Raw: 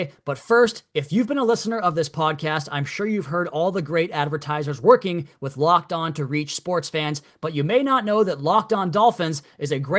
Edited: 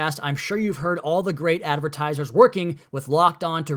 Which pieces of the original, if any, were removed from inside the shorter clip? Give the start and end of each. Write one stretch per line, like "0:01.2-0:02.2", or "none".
none